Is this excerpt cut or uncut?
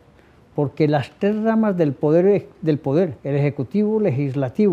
cut